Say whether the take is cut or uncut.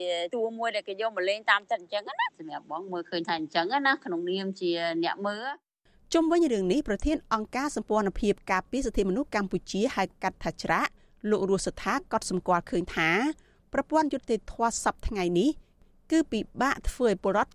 uncut